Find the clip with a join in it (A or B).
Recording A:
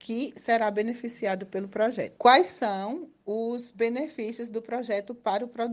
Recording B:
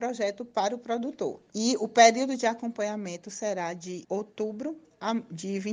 B